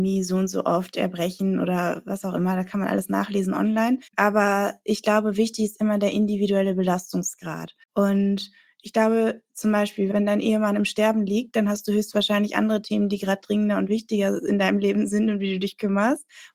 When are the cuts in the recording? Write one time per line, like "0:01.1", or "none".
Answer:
0:04.1
0:07.8